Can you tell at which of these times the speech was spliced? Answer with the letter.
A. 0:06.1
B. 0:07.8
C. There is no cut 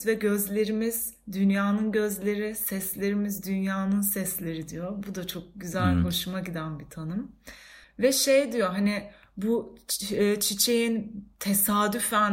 B